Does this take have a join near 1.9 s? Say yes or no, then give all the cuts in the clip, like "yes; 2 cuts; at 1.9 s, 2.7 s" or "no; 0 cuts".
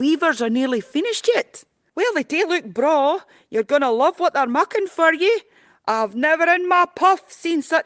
yes; 1 cut; at 1.9 s